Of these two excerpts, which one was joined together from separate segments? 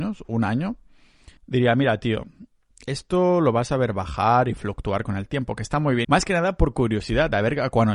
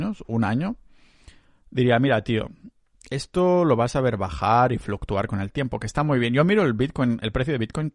first; 2 cuts; at 1.4 s, 6.0 s

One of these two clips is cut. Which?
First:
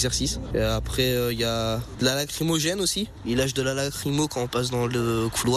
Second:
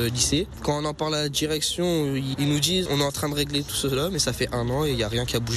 second; 1 cut; at 2.9 s

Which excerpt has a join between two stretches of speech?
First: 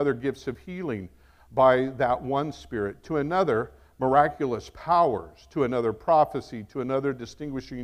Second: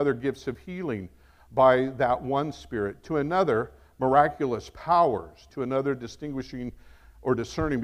second; 1 cut; at 5.5 s

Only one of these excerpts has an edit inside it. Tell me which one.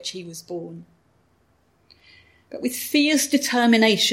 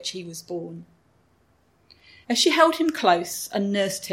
second; 1 cut; at 2.2 s

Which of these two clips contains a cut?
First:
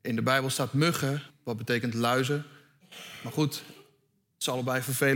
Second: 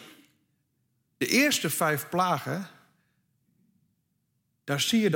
first; 1 cut; at 1.3 s

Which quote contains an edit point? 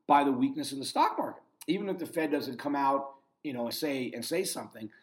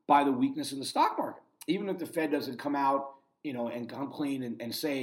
first; 1 cut; at 3.7 s

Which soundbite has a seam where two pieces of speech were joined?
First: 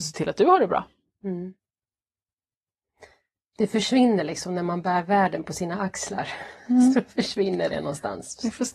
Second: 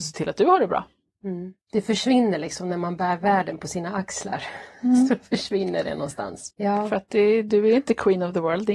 second; 2 cuts; at 1.6 s, 6.5 s

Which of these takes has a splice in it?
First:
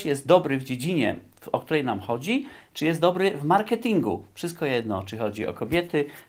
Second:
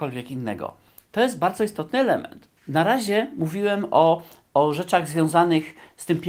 second; 1 cut; at 2.6 s

